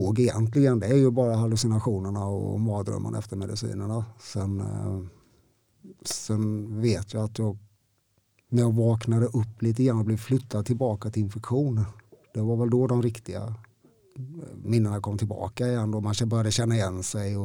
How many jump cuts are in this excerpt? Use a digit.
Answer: 0